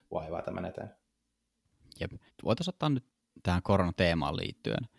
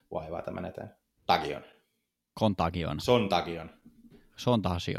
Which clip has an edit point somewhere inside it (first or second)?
second